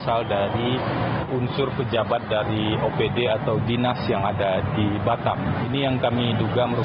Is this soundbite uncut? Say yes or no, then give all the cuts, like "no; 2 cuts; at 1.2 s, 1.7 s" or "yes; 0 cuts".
no; 1 cut; at 1.3 s